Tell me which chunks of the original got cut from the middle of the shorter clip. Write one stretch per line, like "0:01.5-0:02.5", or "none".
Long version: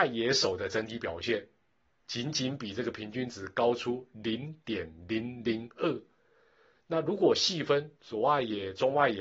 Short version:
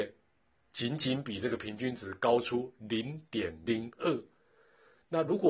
0:05.0-0:05.4